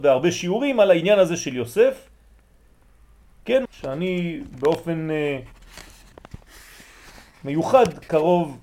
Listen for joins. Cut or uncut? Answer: cut